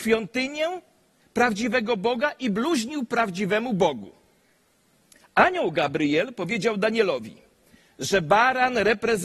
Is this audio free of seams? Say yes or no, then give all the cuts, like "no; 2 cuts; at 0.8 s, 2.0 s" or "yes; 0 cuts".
yes; 0 cuts